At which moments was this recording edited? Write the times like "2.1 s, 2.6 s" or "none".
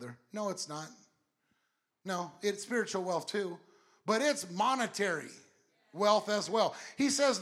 none